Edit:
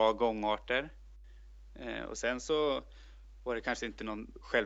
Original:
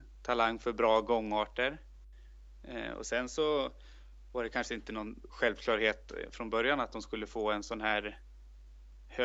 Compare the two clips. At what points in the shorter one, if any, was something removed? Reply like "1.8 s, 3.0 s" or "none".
none